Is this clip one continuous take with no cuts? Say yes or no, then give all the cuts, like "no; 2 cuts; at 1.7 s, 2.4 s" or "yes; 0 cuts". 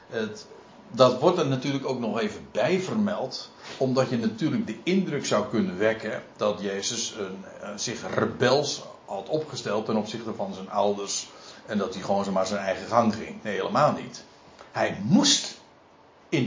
yes; 0 cuts